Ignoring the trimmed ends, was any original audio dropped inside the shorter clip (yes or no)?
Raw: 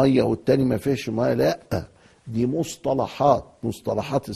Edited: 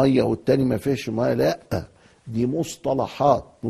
no